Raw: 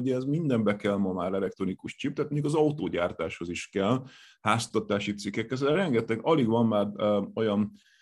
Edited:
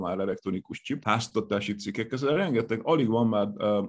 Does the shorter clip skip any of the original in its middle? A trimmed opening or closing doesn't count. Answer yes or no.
yes